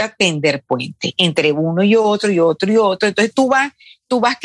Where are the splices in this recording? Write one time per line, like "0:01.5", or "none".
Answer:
none